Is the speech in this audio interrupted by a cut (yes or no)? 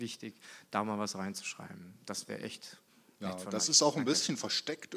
no